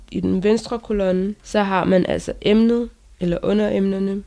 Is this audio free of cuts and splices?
yes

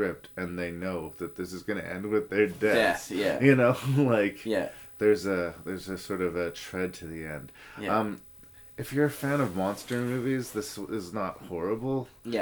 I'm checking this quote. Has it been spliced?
no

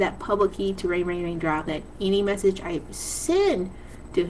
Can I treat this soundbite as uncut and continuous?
no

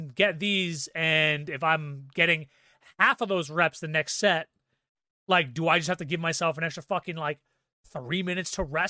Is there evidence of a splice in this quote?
no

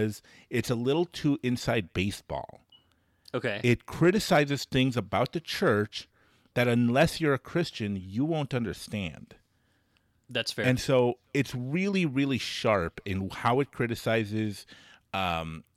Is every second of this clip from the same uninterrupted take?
yes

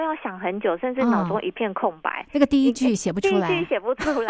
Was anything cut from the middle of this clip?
no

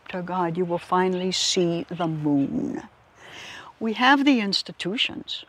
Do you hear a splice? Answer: no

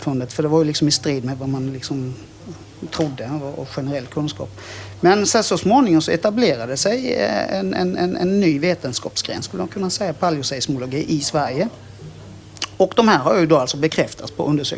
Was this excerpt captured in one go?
yes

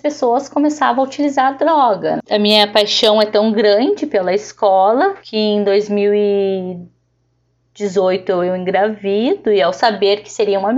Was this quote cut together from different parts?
yes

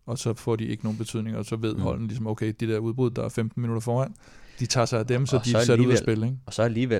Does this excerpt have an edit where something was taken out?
no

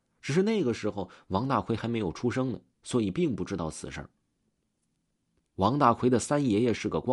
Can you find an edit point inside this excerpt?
no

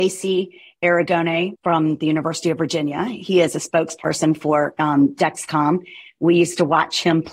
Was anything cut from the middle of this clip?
no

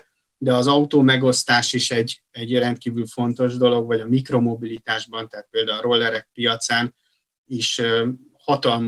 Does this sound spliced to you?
no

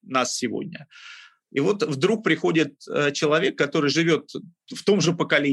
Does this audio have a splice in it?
no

